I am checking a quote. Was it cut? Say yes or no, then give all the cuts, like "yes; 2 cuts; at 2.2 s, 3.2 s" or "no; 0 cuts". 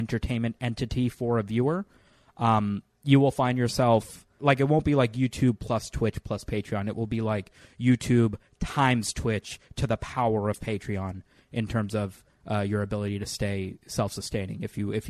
no; 0 cuts